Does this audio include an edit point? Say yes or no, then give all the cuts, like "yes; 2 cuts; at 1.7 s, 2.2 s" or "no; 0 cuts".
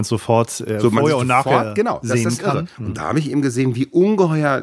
yes; 1 cut; at 2.7 s